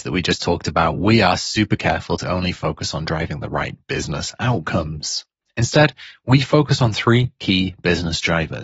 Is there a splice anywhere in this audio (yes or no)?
yes